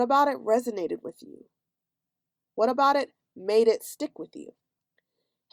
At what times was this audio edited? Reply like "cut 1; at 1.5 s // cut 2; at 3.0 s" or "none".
none